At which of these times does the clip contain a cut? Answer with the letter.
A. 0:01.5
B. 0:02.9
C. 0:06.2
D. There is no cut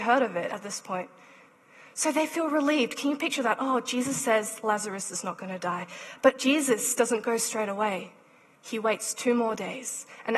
D